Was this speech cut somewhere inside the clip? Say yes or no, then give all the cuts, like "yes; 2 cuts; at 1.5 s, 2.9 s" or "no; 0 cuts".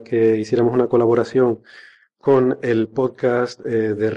no; 0 cuts